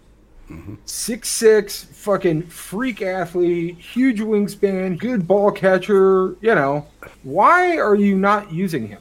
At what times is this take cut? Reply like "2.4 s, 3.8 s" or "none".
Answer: 5.0 s, 7.1 s

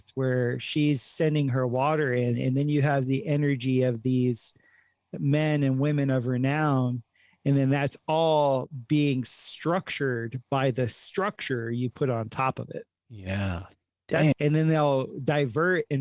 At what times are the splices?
14.3 s

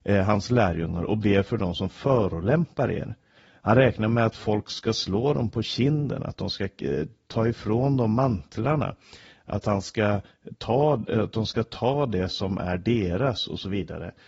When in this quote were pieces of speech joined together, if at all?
none

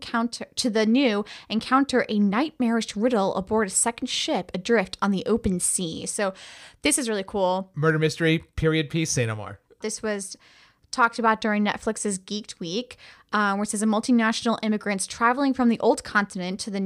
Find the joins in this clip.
9.8 s

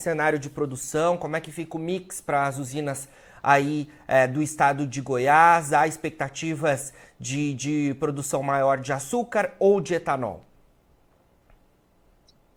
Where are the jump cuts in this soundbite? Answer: none

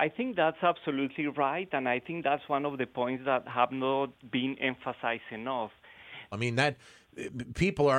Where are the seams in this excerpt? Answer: 6.3 s

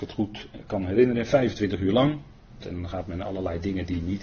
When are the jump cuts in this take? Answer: 2.6 s

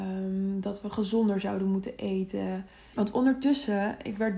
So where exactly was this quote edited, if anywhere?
2.9 s

